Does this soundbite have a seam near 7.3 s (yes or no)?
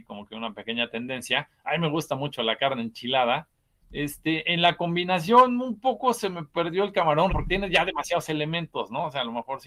yes